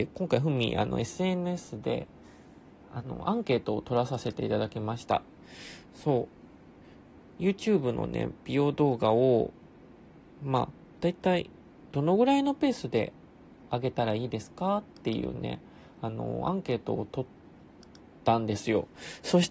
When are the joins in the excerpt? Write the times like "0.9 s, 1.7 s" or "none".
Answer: none